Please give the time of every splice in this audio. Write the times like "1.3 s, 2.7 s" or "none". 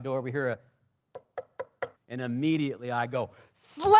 1.9 s

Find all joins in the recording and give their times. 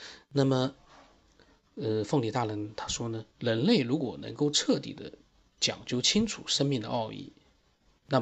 3.3 s

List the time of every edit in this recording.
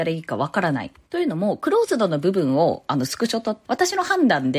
3.7 s

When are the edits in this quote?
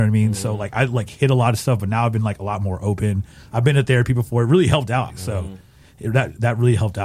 5.1 s

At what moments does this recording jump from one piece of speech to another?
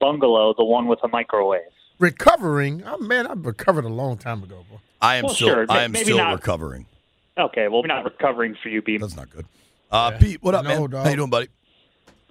7.8 s, 9.0 s

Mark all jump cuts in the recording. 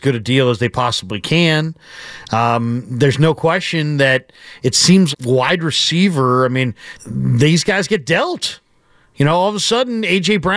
5.1 s, 7.0 s

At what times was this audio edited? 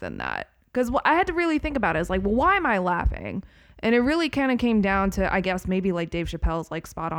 none

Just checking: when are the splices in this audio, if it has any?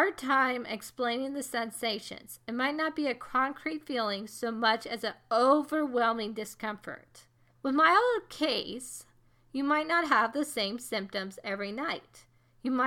7.5 s

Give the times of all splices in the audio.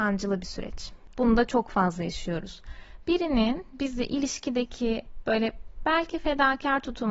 1.1 s

